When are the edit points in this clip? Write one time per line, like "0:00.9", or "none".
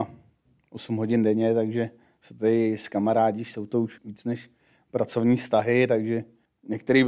0:04.0

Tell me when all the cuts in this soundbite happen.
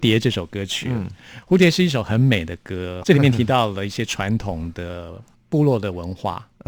0:03.0

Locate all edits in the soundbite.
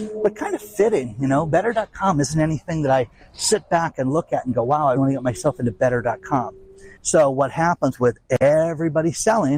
0:05.0
0:07.0

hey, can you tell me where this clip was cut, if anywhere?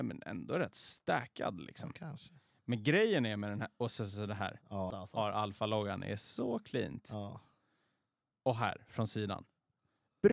0:04.9

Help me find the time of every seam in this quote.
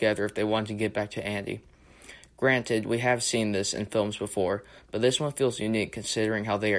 none

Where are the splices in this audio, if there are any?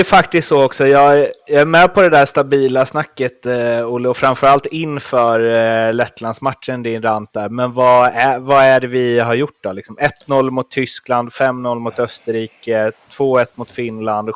none

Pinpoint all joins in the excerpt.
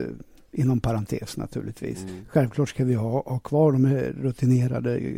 none

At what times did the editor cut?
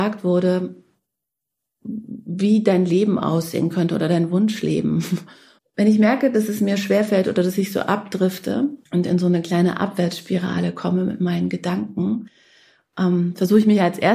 0:05.6
0:08.8

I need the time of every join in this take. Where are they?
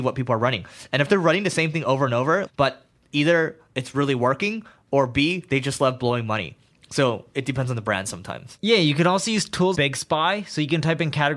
0:02.5
0:09.7

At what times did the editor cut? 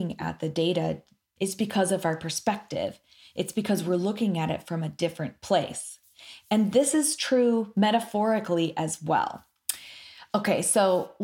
0:01.4

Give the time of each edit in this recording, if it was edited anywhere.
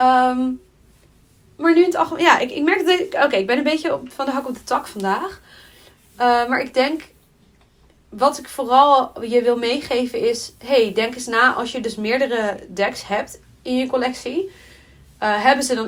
none

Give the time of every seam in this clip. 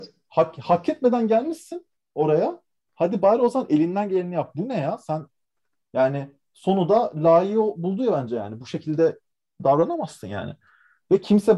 none

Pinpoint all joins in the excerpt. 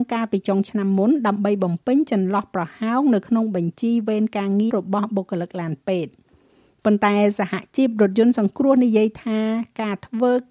0:04.7

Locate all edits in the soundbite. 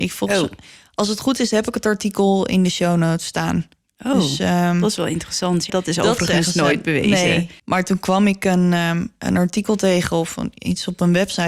0:05.7
0:07.6

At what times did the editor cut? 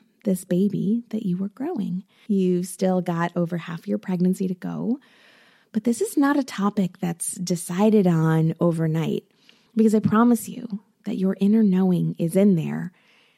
0:02.3
0:09.7

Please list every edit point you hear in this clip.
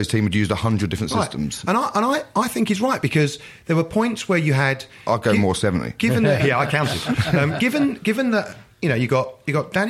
0:06.4

